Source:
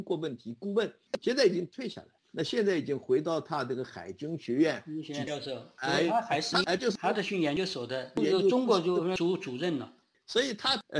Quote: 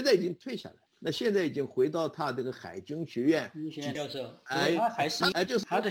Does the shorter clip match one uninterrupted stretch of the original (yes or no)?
yes